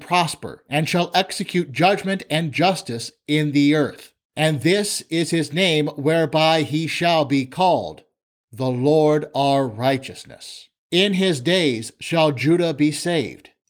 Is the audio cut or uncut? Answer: uncut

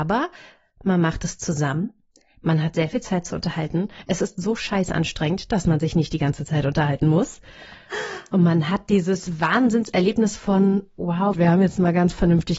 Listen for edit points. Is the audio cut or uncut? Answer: cut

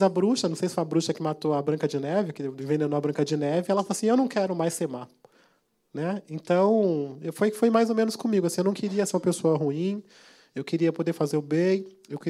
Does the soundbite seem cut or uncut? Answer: uncut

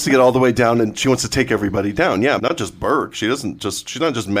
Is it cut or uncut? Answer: cut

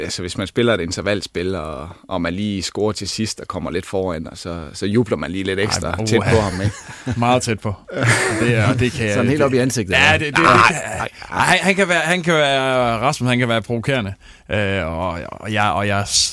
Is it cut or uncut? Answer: uncut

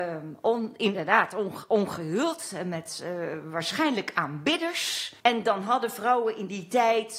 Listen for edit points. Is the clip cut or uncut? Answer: cut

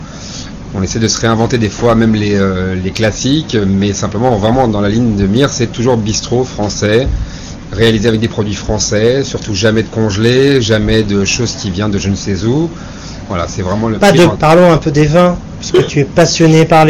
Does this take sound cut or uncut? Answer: cut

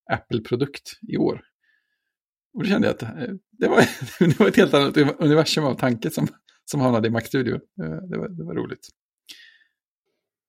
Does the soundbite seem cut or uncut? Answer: uncut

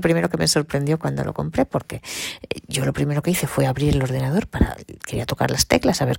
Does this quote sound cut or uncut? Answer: uncut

